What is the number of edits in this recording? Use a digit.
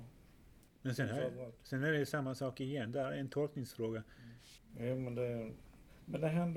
1